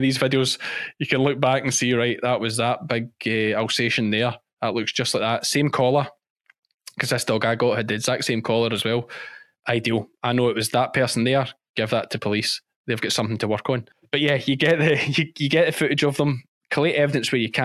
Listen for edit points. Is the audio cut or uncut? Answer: uncut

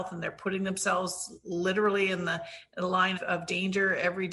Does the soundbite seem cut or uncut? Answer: cut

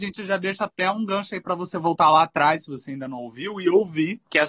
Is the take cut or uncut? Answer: uncut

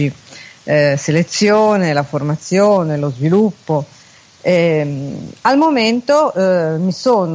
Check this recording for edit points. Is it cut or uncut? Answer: uncut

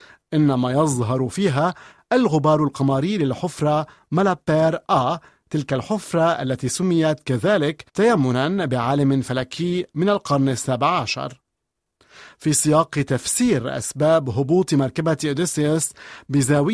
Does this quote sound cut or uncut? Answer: cut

